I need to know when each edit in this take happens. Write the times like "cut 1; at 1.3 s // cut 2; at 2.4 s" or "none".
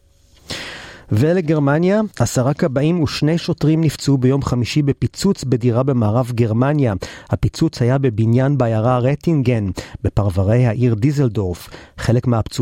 cut 1; at 2.1 s